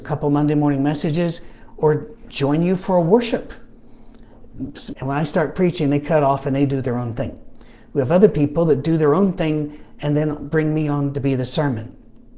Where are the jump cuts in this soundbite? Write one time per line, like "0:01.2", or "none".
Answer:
0:04.9